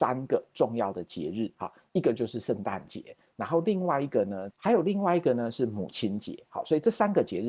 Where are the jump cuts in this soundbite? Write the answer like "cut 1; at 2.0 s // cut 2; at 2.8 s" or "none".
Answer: cut 1; at 4.5 s